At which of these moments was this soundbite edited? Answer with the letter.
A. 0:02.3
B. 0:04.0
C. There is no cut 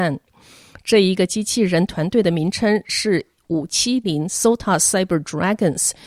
B